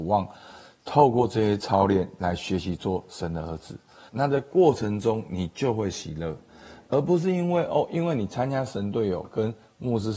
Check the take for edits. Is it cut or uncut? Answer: cut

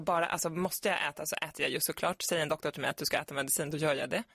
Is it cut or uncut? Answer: uncut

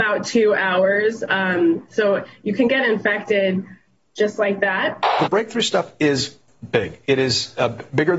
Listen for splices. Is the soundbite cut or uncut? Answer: uncut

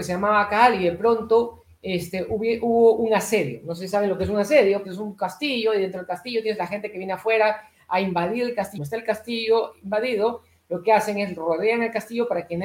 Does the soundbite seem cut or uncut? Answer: cut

